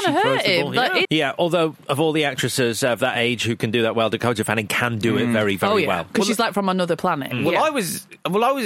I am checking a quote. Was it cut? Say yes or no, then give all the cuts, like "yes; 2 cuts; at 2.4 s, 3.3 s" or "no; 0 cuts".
yes; 1 cut; at 1.0 s